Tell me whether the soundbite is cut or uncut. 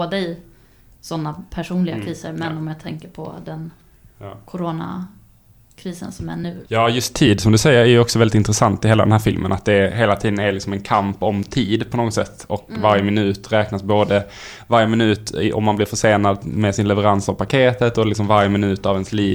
uncut